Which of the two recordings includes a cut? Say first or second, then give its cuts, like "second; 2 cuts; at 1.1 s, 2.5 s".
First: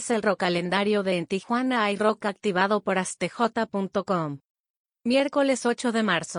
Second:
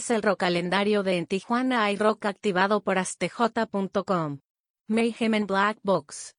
second; 1 cut; at 4.8 s